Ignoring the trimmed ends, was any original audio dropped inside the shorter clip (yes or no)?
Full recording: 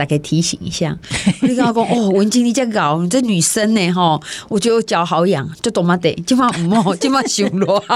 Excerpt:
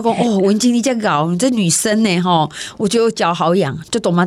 no